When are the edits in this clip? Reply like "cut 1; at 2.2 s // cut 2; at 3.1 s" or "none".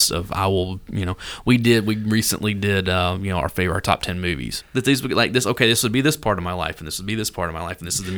cut 1; at 4.6 s